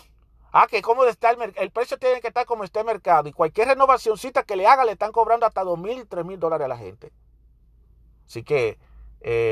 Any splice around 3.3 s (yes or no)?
no